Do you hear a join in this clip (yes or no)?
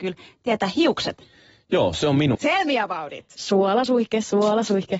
yes